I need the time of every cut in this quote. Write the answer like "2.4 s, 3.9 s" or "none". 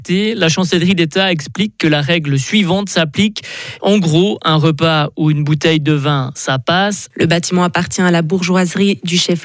3.8 s, 7.1 s